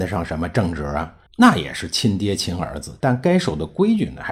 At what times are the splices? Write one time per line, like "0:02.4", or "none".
0:01.3
0:03.0